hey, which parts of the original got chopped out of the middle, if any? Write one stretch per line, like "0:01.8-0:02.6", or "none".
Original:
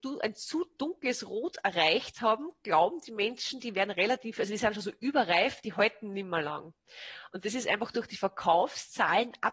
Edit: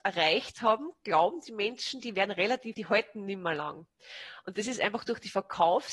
0:04.3-0:05.6